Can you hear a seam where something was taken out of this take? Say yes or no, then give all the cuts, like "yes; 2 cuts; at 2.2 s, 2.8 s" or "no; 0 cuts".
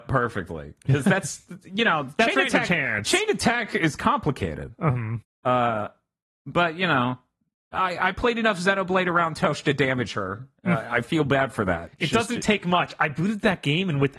yes; 1 cut; at 5.2 s